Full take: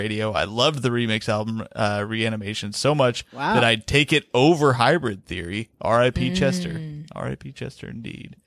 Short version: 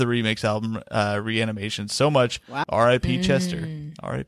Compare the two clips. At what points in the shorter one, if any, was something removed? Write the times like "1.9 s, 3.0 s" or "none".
2.6 s